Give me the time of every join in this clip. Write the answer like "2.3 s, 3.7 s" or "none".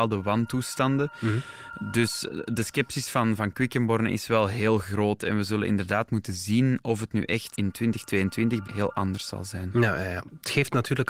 8.6 s